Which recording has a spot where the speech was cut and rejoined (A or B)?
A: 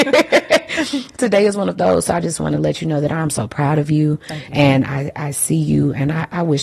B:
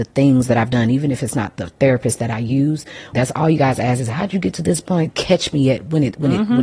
B